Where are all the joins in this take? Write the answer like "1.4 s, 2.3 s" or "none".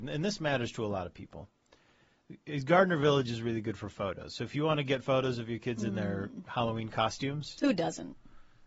none